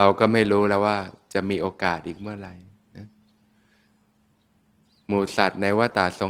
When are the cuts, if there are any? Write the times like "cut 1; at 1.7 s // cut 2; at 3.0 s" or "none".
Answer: none